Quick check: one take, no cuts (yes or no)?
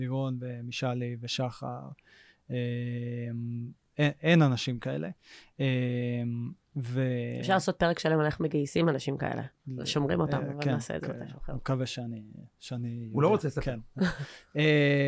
yes